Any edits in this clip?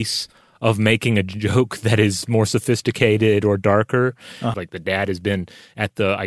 yes; 1 cut; at 4.5 s

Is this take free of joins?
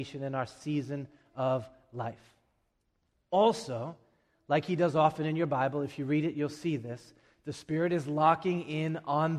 yes; 0 cuts

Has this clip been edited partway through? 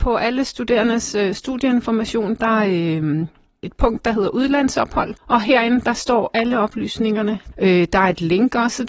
yes; 3 cuts; at 2.4 s, 5.2 s, 7.5 s

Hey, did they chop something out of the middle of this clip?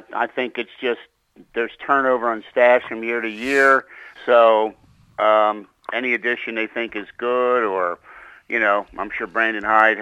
yes; 1 cut; at 4.2 s

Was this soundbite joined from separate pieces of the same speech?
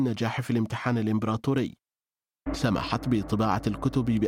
yes; 1 cut; at 2.5 s

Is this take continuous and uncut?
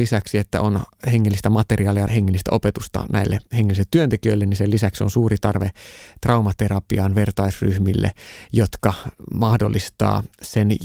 no; 1 cut; at 2.1 s

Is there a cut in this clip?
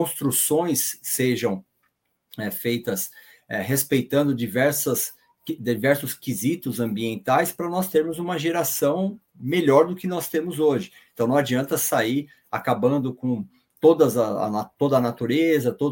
yes; 1 cut; at 9.3 s

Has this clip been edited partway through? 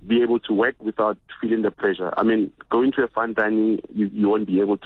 no; 0 cuts

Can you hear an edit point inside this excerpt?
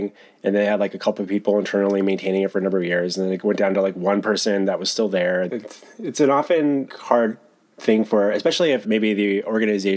yes; 3 cuts; at 5.5 s, 6.9 s, 8.8 s

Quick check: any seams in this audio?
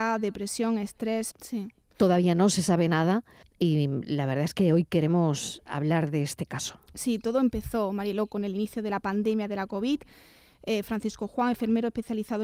yes; 2 cuts; at 1.3 s, 3.4 s

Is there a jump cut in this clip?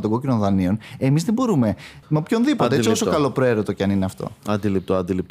yes; 1 cut; at 2.0 s

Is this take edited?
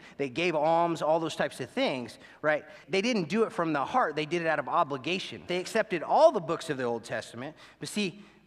yes; 2 cuts; at 2.8 s, 5.5 s

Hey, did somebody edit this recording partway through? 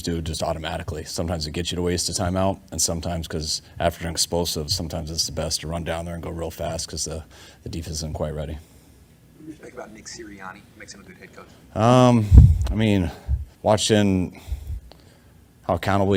yes; 1 cut; at 13.5 s

